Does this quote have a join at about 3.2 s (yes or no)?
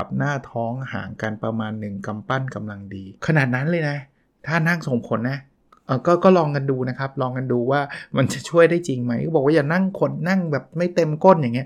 yes